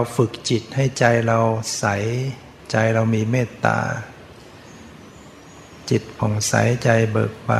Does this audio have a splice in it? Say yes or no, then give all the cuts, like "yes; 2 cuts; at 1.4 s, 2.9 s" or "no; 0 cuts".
no; 0 cuts